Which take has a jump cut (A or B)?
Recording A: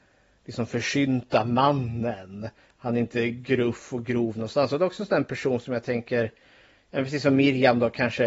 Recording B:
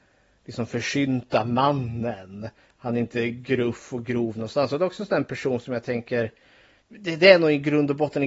B